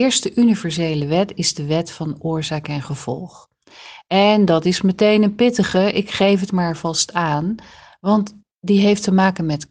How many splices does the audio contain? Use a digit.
0